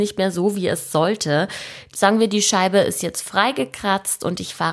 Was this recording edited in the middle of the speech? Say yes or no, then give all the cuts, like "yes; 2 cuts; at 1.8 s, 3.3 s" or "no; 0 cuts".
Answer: yes; 1 cut; at 1.9 s